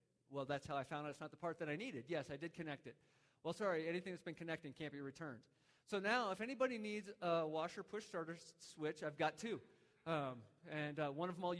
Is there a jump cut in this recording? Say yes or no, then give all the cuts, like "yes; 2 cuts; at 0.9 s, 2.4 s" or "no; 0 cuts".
no; 0 cuts